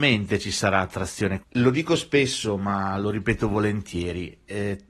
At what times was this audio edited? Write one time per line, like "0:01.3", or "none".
0:01.4